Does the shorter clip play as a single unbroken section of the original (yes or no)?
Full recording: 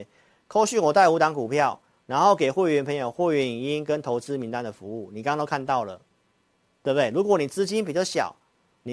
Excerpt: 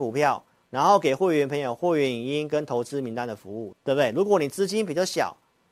no